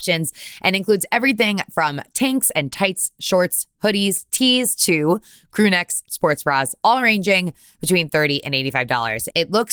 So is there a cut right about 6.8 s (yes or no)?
yes